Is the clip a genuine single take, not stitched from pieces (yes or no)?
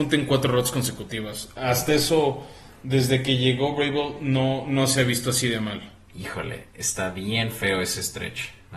yes